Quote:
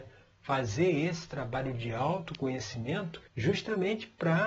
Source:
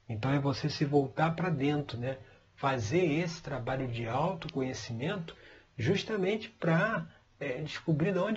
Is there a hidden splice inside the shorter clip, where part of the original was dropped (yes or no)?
yes